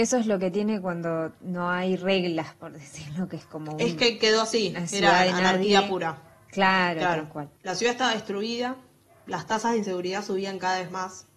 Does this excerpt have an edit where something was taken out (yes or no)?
no